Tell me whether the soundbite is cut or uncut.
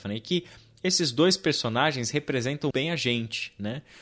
cut